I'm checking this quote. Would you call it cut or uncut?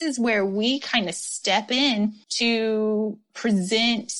cut